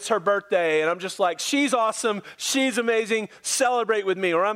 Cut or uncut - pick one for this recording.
uncut